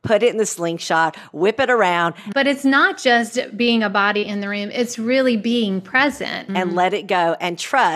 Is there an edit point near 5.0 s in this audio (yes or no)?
no